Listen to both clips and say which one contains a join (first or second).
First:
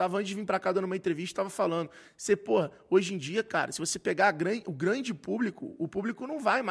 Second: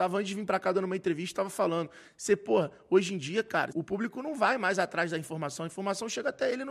second